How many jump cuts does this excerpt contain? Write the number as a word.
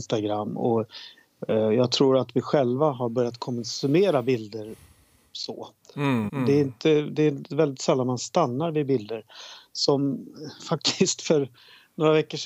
one